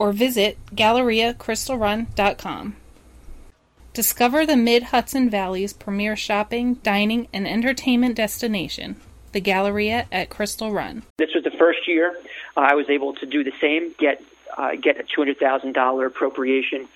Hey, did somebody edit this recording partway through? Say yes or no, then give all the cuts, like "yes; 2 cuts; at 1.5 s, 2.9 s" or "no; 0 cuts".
yes; 2 cuts; at 3.8 s, 11.1 s